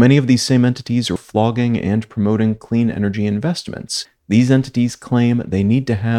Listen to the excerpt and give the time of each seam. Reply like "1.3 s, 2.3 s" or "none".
1.2 s, 4.2 s